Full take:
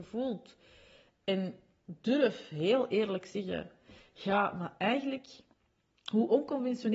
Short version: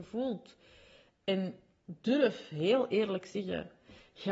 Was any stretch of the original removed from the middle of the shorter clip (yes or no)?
no